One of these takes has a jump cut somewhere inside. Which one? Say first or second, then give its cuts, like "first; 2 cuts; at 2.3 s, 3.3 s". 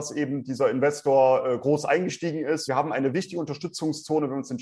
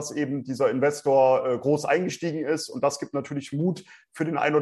first; 1 cut; at 2.7 s